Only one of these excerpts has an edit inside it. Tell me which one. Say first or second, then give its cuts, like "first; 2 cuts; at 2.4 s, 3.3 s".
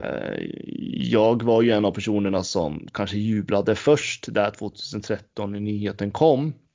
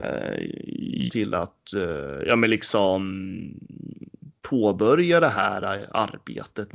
second; 2 cuts; at 1.1 s, 4.4 s